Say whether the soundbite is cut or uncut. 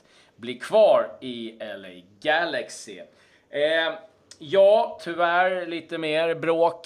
cut